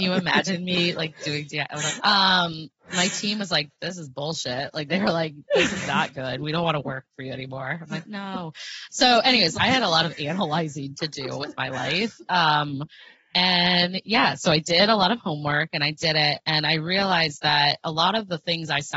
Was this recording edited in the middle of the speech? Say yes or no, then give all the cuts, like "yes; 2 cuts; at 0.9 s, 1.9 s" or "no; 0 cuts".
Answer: yes; 2 cuts; at 2.0 s, 9.5 s